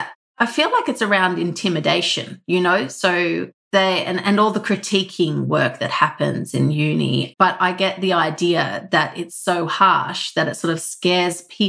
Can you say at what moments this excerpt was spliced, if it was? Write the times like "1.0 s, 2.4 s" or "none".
7.3 s